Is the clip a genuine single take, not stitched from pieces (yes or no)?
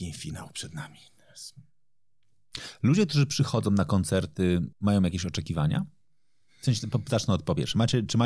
no